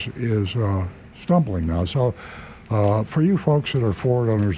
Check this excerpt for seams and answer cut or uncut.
uncut